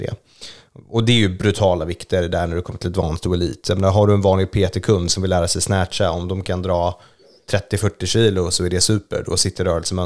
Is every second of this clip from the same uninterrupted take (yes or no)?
yes